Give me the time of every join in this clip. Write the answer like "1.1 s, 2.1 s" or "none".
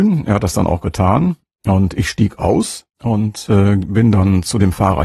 2.9 s